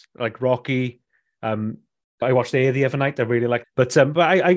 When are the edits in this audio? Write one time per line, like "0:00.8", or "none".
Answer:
0:02.2
0:03.6